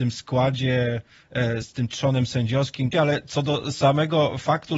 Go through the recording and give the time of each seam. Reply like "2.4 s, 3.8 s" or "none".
1.6 s, 2.9 s